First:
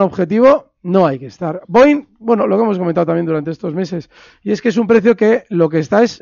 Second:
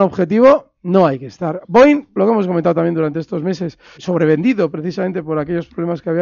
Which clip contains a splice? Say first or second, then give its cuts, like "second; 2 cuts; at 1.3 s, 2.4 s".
second; 2 cuts; at 2.2 s, 4.0 s